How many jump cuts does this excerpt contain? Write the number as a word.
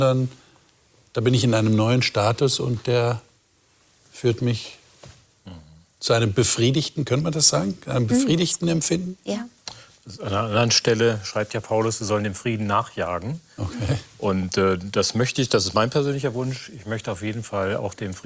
zero